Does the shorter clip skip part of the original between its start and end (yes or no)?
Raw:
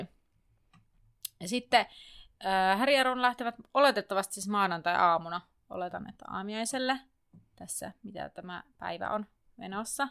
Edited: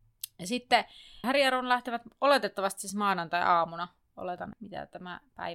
yes